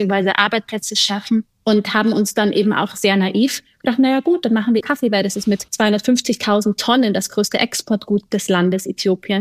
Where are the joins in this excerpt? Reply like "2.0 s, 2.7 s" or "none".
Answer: 4.8 s

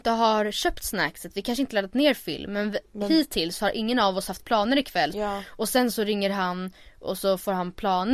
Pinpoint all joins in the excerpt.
5.1 s

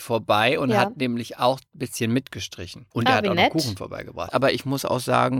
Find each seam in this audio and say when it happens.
2.9 s, 4.3 s

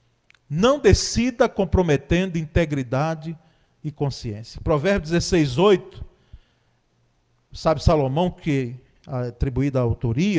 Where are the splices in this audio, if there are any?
none

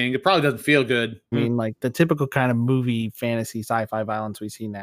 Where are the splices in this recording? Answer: 1.3 s

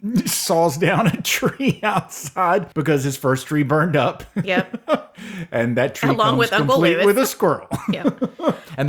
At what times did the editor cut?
none

